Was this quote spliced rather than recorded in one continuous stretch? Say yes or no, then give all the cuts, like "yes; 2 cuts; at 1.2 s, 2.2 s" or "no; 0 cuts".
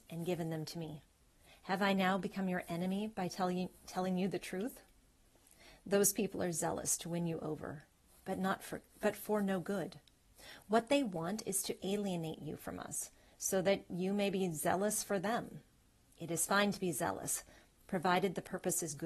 no; 0 cuts